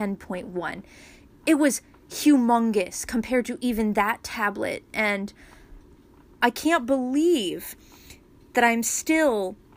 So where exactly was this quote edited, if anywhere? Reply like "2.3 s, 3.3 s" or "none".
none